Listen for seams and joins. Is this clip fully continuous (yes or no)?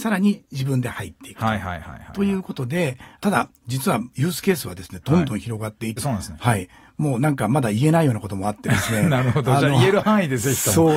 no